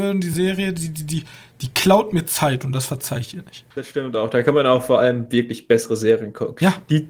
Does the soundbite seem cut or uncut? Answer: cut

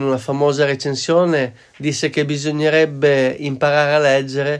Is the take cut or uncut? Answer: uncut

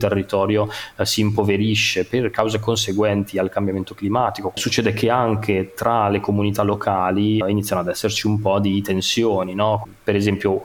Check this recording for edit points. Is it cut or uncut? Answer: cut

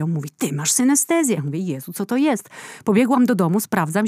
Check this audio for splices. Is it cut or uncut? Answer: uncut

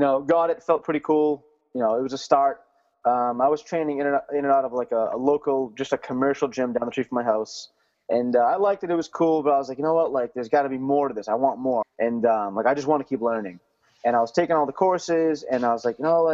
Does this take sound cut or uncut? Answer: cut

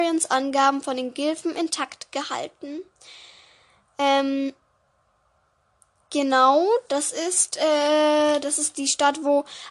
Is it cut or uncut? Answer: uncut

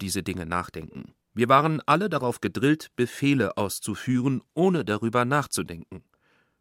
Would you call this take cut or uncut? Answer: cut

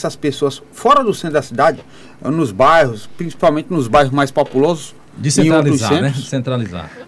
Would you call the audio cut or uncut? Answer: uncut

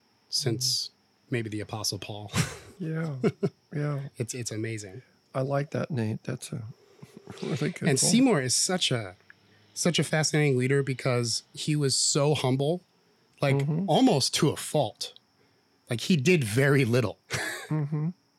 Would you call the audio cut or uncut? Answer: uncut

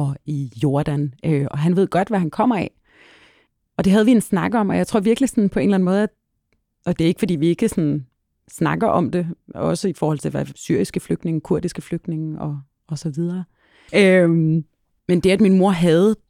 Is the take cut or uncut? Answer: cut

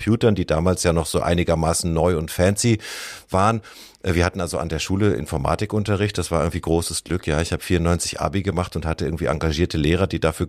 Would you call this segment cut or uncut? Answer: uncut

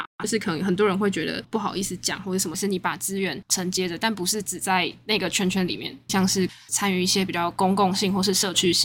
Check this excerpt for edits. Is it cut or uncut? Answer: cut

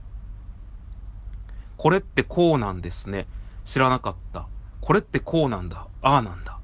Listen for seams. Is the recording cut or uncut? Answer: uncut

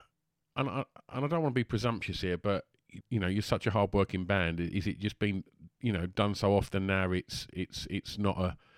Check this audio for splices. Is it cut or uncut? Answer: cut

